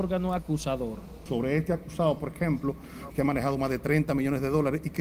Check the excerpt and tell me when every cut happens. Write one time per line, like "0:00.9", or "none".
0:03.1

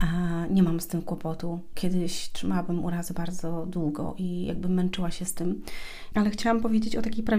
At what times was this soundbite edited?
0:06.1

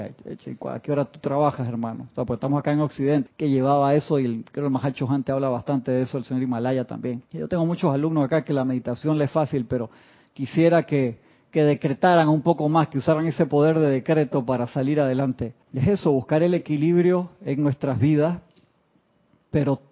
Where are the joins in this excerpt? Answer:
0:03.3
0:07.3
0:15.6

